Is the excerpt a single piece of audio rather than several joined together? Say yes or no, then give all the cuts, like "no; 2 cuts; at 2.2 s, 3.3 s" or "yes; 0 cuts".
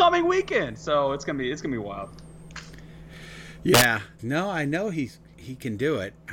no; 1 cut; at 4.2 s